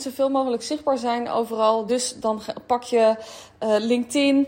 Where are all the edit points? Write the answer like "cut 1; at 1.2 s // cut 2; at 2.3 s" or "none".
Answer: none